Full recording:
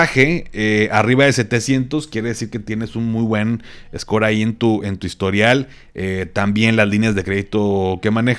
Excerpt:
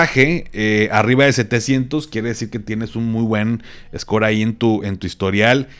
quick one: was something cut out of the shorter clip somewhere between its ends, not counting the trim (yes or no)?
no